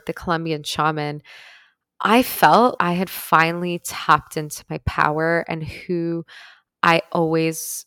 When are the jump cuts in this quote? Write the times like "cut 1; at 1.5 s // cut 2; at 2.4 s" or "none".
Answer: cut 1; at 2.8 s

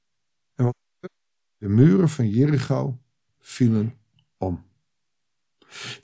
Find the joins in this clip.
none

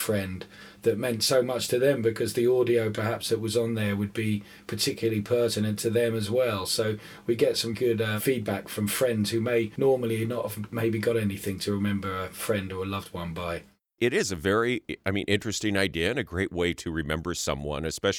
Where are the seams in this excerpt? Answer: cut 1; at 7.7 s

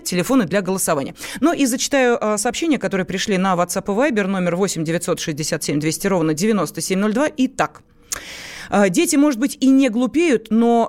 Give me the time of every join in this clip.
none

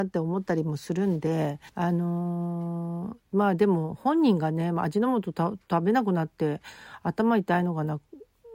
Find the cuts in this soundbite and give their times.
cut 1; at 1.7 s

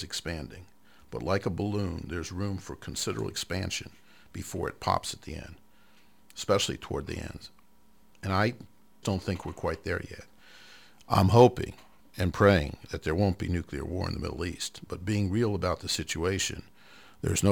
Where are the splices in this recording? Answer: cut 1; at 9.0 s

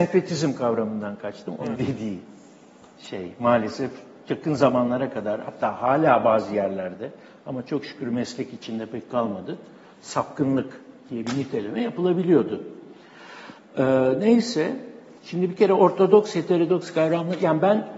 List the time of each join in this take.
cut 1; at 1.7 s // cut 2; at 15.2 s

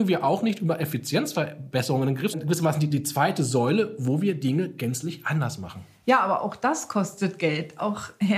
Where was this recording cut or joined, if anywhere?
cut 1; at 2.3 s

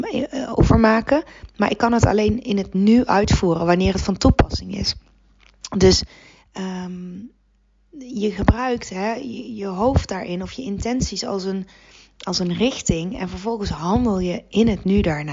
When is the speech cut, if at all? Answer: none

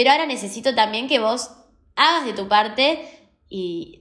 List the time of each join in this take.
none

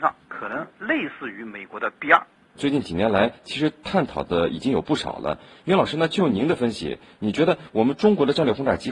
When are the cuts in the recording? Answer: cut 1; at 2.5 s

